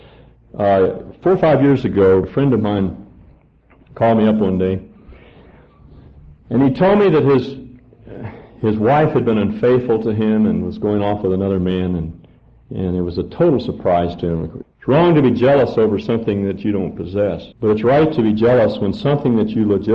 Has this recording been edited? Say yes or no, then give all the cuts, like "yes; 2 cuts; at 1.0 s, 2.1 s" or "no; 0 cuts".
yes; 3 cuts; at 2.2 s, 14.6 s, 17.5 s